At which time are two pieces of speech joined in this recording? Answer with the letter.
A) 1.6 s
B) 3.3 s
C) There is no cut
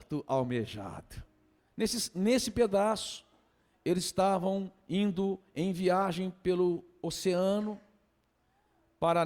A